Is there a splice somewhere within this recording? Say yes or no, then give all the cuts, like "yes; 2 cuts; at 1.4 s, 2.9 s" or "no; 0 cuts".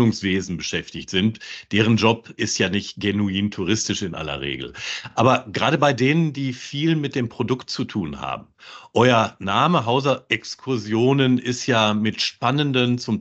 no; 0 cuts